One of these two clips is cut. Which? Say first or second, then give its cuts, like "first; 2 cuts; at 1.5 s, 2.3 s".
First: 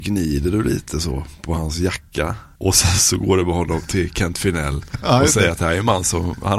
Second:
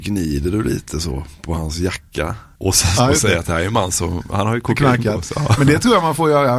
second; 1 cut; at 3.0 s